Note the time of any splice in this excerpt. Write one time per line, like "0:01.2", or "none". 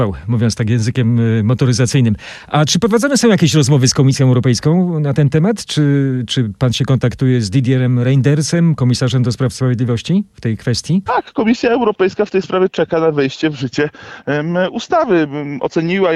0:11.1

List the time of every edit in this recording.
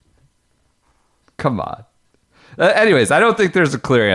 none

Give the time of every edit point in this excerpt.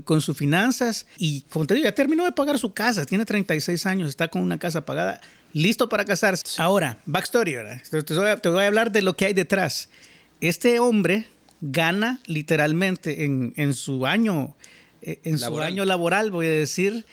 0:01.2
0:06.4

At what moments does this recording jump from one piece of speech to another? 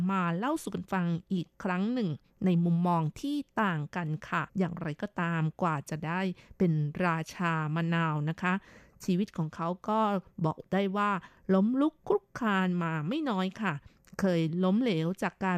0:04.5

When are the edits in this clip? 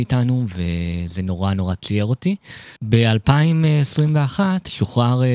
0:02.8

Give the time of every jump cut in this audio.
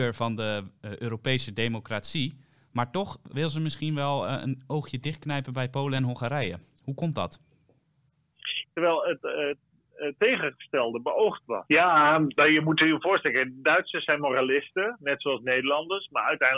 0:08.6
0:11.7

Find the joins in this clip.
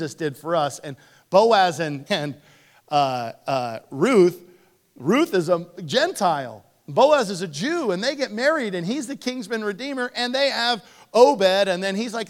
0:02.1

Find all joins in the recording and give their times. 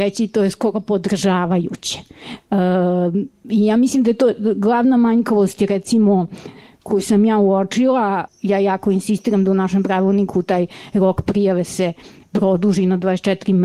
0:08.3

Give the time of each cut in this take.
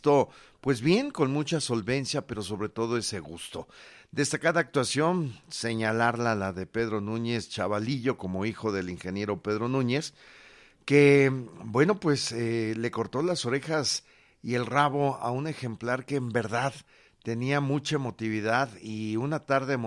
none

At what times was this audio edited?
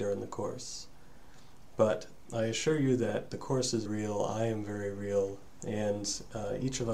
0:03.9
0:05.6

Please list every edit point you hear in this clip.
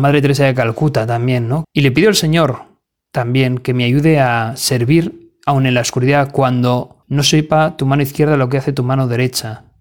0:01.6
0:07.0

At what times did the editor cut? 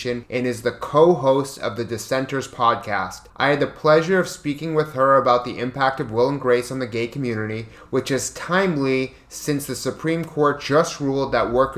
none

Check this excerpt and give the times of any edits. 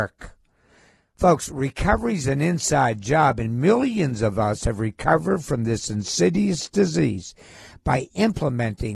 none

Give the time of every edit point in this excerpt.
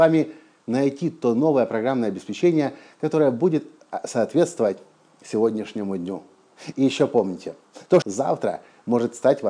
0:06.7
0:08.0

